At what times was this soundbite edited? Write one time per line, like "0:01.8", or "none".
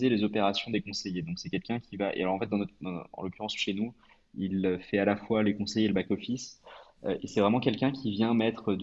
none